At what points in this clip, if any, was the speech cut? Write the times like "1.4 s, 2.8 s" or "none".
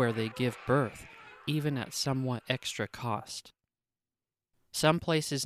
4.5 s

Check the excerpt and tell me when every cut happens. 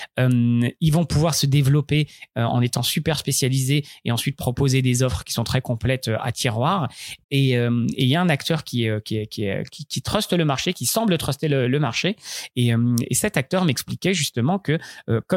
7.2 s

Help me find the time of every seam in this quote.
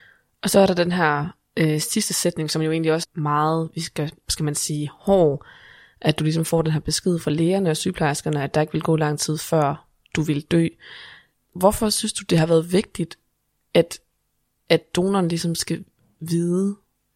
3.0 s, 11.3 s

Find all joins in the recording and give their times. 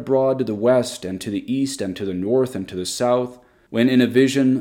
3.7 s

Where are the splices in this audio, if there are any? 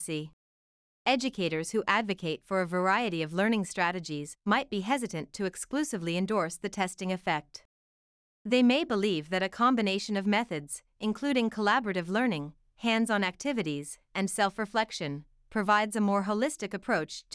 1.0 s

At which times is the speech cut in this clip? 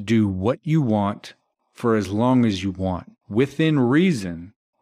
1.6 s

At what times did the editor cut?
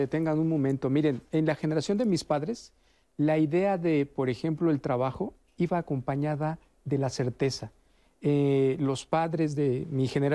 none

